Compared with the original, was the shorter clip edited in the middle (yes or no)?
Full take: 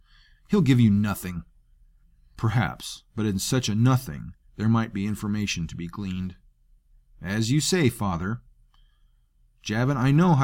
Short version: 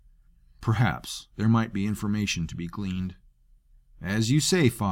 yes